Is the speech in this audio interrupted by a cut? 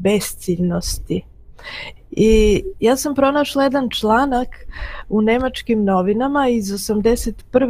yes; 1 cut; at 2.0 s

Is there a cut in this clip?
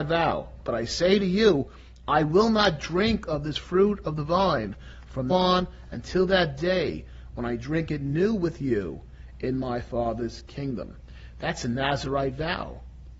yes; 1 cut; at 5.3 s

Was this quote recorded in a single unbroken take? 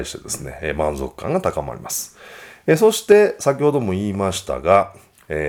yes; 0 cuts

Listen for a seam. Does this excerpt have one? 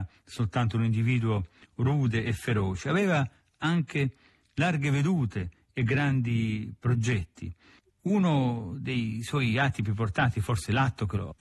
no; 0 cuts

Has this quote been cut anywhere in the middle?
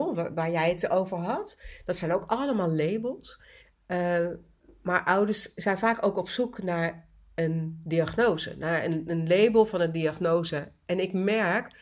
no; 0 cuts

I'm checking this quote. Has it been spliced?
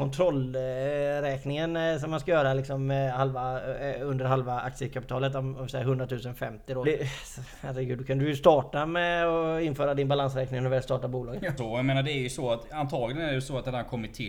yes; 2 cuts; at 6.8 s, 11.6 s

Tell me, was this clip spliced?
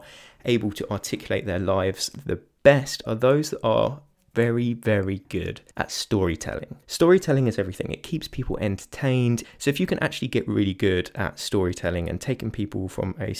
yes; 3 cuts; at 5.7 s, 6.8 s, 9.4 s

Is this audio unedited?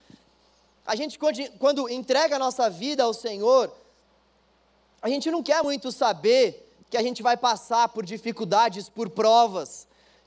yes; 0 cuts

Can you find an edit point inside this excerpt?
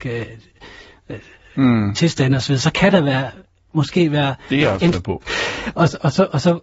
yes; 1 cut; at 5.2 s

